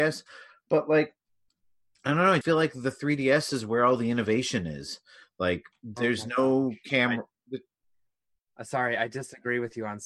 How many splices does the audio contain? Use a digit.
1